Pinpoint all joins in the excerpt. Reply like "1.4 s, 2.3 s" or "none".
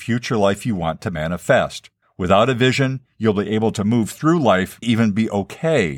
2.0 s, 4.8 s